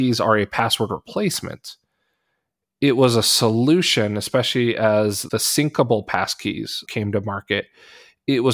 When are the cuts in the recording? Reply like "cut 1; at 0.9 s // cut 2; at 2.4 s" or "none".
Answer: none